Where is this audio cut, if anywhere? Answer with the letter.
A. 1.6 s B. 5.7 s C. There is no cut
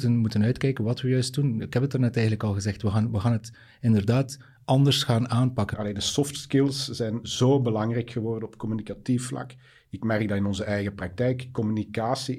B